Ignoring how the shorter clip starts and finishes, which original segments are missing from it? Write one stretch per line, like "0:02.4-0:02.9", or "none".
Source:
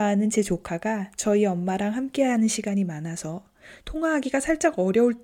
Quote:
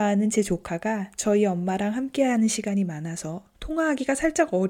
0:03.5-0:03.8

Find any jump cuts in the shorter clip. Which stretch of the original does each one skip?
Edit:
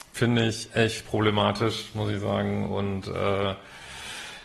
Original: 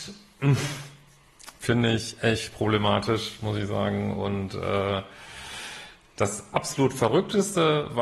none

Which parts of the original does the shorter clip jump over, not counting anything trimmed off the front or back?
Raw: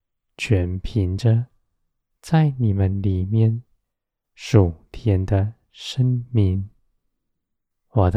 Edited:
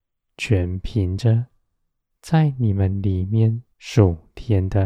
0:03.7-0:04.3

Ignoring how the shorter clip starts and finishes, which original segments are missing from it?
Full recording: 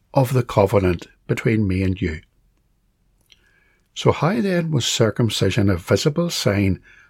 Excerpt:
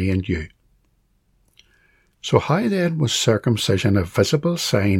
none

